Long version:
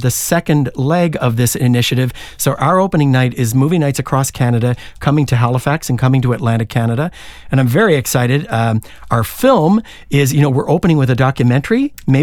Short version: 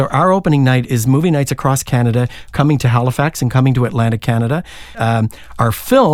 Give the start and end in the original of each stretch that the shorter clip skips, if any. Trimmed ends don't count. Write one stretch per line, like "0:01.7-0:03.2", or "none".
0:07.4-0:08.5